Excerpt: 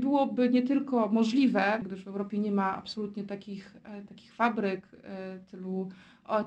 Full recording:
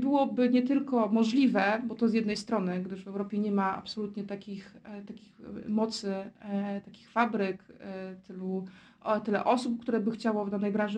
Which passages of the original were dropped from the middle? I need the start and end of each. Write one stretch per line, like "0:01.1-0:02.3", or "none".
0:01.8-0:02.8
0:05.1-0:06.8